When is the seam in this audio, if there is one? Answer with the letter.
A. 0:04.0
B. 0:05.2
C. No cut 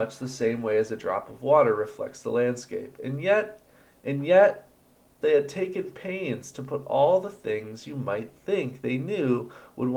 B